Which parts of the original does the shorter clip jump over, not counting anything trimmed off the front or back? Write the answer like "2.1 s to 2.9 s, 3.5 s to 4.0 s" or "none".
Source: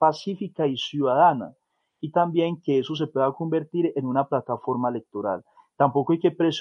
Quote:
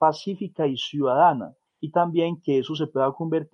1.7 s to 1.9 s

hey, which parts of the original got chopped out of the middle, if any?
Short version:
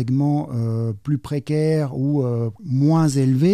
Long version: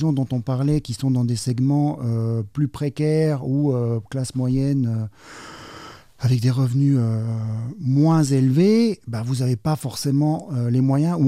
4.1 s to 7.7 s

